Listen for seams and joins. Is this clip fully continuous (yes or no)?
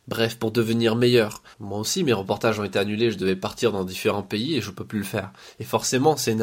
no